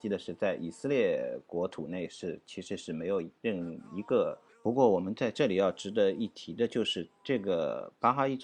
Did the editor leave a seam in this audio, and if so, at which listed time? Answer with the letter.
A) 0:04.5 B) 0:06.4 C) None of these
A